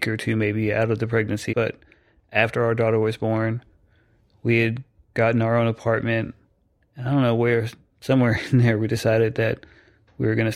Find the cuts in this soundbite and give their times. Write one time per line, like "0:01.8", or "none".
0:01.5